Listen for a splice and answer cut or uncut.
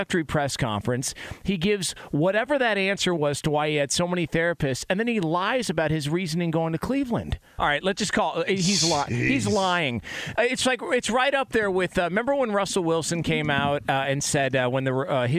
cut